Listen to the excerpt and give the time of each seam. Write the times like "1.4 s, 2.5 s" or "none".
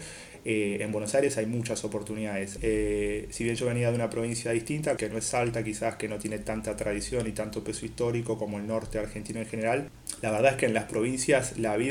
2.6 s, 5.0 s